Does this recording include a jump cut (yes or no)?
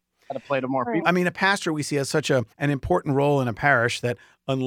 yes